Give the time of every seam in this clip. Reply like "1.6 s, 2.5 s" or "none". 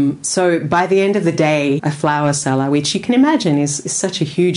1.8 s